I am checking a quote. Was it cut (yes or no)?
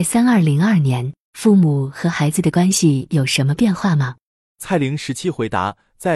no